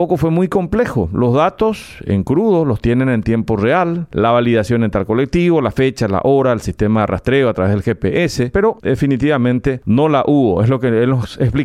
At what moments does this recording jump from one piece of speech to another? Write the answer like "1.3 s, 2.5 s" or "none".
8.5 s